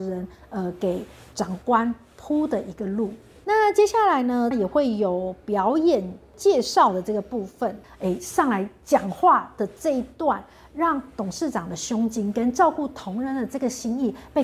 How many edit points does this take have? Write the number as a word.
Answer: two